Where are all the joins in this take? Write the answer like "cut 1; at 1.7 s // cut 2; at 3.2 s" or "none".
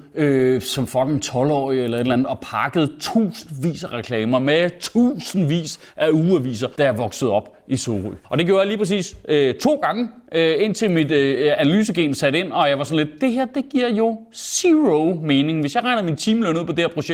cut 1; at 6.8 s // cut 2; at 8.2 s